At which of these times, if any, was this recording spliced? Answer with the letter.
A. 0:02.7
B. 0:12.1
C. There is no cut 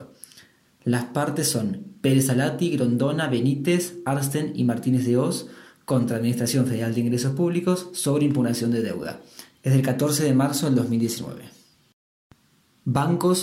C